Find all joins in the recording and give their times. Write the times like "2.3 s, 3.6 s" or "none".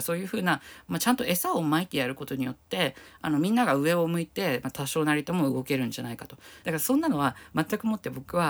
6.6 s